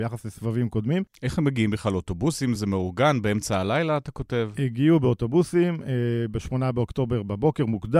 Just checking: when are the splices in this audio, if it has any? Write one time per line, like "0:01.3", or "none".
none